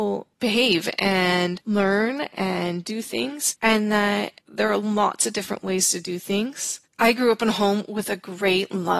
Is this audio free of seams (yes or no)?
no